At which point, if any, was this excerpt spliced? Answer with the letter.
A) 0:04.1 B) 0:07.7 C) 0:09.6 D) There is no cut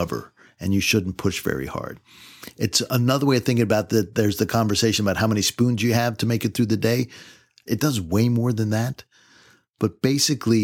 B